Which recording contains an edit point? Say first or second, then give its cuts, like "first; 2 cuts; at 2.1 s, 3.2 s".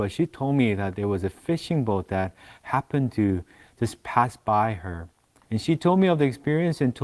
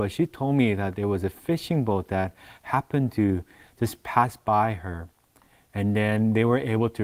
first; 1 cut; at 5.4 s